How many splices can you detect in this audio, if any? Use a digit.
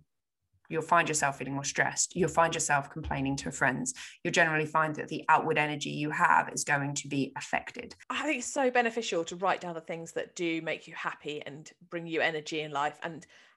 1